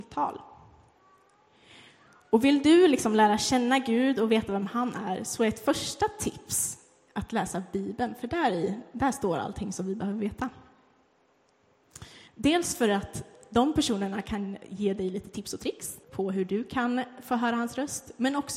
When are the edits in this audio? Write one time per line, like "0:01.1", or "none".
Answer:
0:12.3
0:16.0

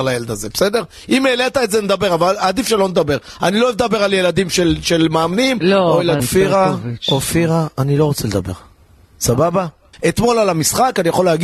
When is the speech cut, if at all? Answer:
0:06.2
0:09.9

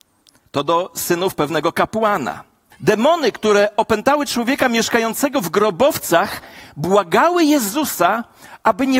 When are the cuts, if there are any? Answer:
0:02.7

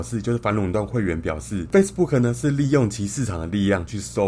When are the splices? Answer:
none

